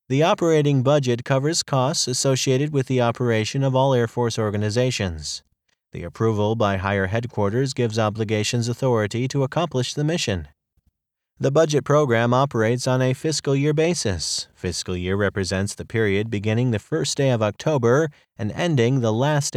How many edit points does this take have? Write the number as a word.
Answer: zero